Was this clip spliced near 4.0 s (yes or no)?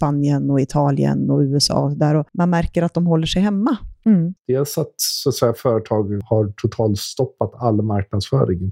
yes